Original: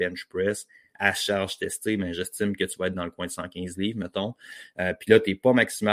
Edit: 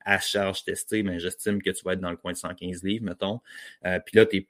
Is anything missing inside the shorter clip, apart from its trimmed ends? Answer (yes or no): no